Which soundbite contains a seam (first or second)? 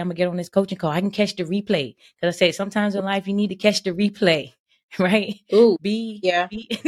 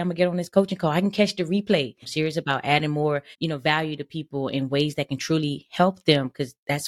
second